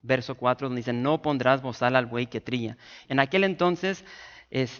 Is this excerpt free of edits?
no; 1 cut; at 3.1 s

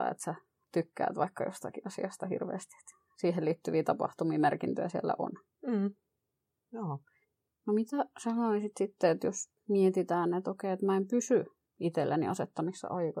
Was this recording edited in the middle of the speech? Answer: no; 0 cuts

